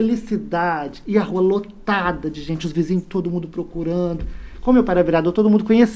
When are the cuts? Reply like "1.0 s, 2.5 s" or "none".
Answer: none